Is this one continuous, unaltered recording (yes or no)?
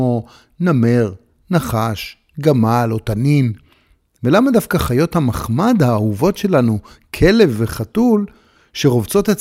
yes